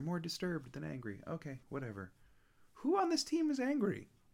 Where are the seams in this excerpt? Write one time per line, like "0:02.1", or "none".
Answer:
0:01.6